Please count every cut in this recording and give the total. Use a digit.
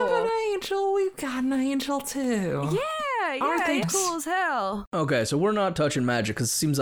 1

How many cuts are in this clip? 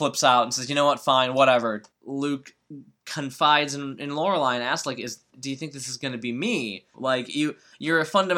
2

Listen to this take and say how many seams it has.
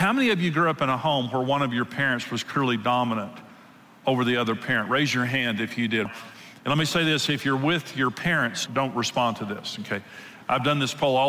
2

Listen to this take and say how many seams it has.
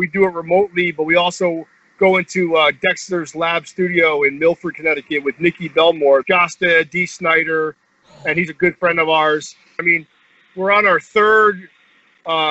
2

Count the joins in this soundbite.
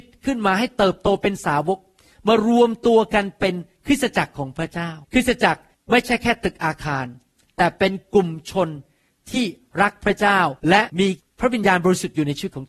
2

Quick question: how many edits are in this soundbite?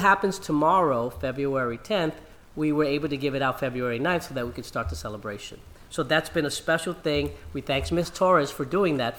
0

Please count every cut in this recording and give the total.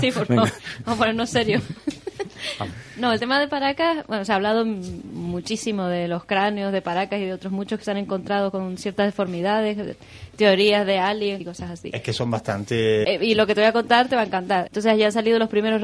3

